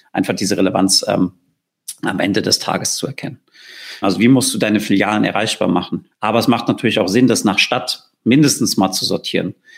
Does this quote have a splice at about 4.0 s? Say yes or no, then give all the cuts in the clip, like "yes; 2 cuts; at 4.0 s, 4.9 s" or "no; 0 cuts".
yes; 2 cuts; at 4.0 s, 6.1 s